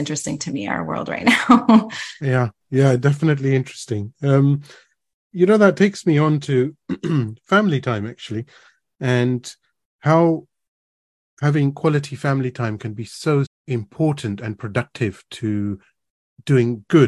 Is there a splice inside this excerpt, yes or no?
yes